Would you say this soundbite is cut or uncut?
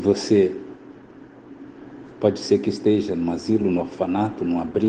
uncut